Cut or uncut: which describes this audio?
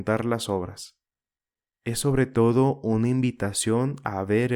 uncut